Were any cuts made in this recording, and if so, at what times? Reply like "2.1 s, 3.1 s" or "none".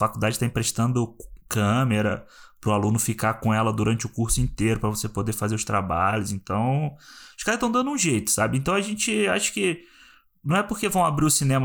none